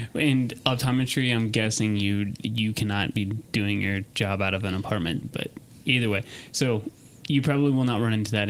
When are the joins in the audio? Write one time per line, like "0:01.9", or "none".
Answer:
0:05.2